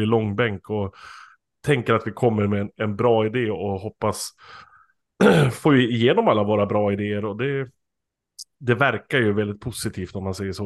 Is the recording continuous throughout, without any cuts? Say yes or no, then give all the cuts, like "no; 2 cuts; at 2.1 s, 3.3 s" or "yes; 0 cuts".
yes; 0 cuts